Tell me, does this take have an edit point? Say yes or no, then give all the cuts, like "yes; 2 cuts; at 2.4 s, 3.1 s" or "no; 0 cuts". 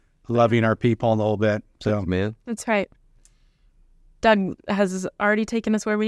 no; 0 cuts